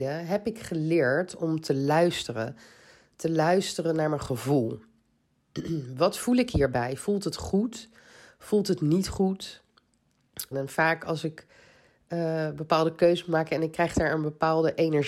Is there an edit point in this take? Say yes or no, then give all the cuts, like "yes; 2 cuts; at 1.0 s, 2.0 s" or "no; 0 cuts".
yes; 1 cut; at 10.5 s